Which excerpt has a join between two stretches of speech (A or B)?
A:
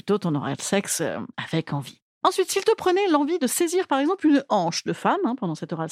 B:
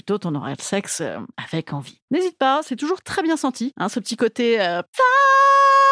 B